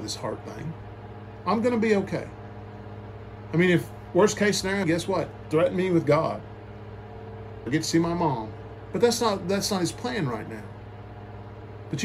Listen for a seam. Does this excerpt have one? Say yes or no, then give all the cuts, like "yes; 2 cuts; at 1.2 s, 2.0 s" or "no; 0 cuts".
yes; 2 cuts; at 4.8 s, 7.7 s